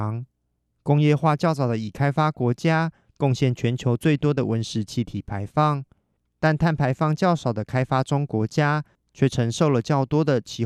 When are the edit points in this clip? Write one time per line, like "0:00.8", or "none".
none